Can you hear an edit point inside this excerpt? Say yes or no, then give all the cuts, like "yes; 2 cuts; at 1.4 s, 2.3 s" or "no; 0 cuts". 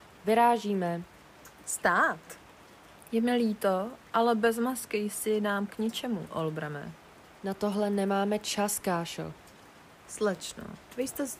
no; 0 cuts